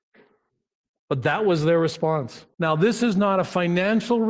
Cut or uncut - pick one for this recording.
cut